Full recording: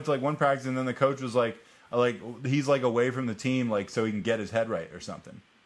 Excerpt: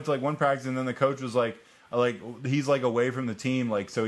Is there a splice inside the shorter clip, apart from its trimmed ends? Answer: no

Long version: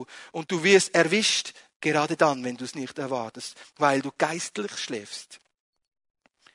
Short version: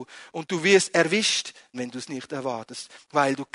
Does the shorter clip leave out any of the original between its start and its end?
yes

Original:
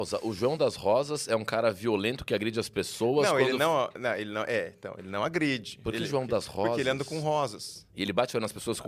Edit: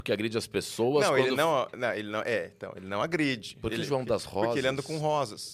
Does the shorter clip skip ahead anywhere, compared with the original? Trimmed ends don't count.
no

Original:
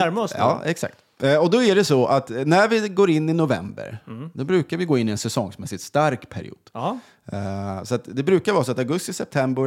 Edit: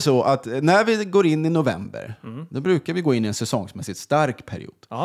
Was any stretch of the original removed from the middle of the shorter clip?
no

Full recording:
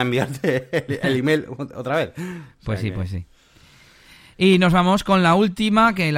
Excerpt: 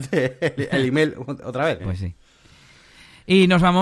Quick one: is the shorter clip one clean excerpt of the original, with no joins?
no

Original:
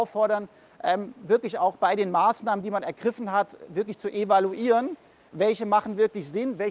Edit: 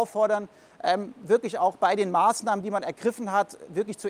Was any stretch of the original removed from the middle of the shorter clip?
no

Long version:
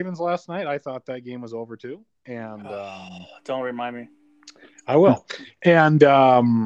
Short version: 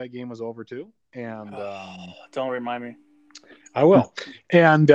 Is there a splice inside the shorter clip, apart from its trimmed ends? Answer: no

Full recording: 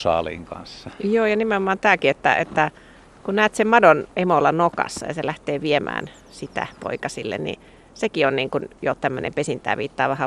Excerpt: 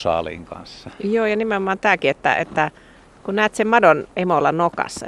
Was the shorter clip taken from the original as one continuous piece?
yes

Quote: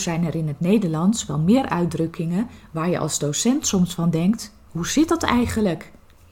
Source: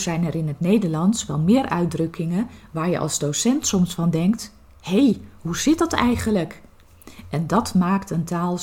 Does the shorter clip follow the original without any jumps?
no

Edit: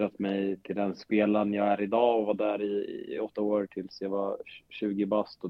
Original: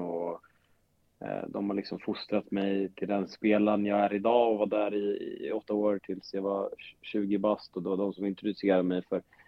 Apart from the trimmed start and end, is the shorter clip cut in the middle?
no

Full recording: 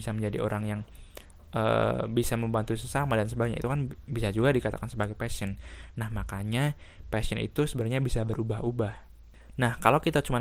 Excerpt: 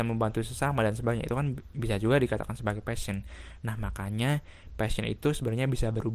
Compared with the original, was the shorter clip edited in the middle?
no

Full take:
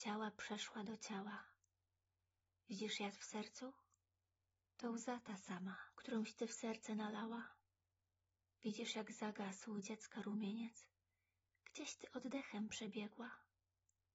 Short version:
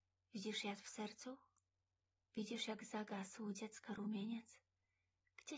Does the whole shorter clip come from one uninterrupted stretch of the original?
no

